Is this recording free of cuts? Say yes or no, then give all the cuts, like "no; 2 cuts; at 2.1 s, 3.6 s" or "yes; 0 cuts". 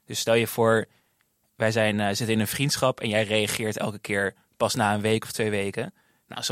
yes; 0 cuts